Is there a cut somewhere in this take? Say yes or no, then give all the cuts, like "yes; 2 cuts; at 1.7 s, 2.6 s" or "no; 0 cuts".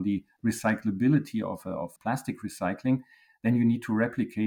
yes; 1 cut; at 2.0 s